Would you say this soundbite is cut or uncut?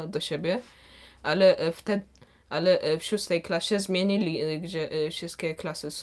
uncut